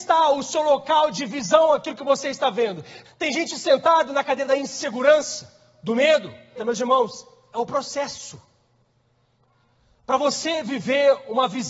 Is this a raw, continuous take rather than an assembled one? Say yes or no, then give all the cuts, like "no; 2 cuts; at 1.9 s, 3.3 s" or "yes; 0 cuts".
no; 2 cuts; at 3.1 s, 6.6 s